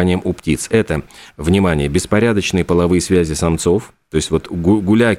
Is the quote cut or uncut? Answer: uncut